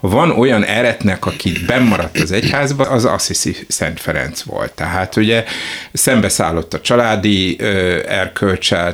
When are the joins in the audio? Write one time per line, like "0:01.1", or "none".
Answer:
0:02.8

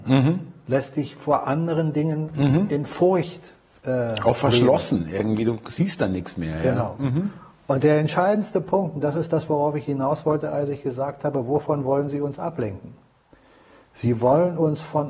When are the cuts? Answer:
none

